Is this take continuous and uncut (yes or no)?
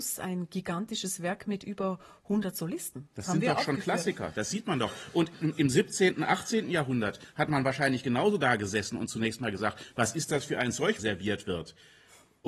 no